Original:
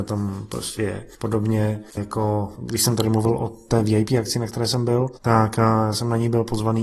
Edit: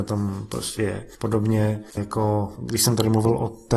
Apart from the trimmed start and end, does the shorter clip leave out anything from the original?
no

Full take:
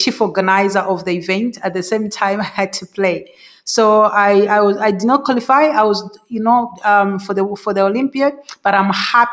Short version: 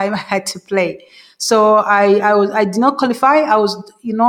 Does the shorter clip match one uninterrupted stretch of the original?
yes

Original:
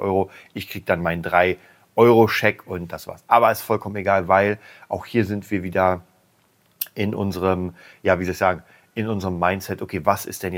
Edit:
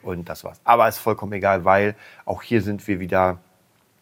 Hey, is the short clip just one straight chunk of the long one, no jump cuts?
yes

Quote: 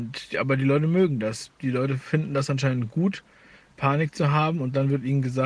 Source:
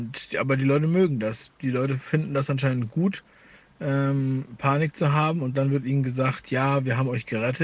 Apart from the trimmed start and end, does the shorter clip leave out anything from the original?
yes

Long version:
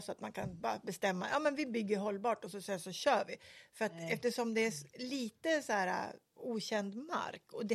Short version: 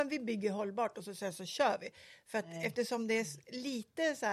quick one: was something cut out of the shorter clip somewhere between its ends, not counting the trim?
no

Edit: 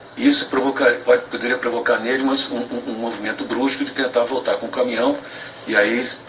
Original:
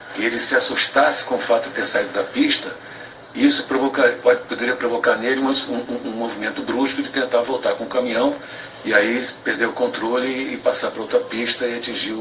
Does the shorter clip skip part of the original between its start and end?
no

